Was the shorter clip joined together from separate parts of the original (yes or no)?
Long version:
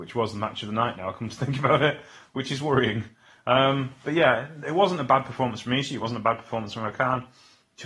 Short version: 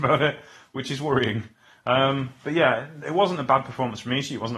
no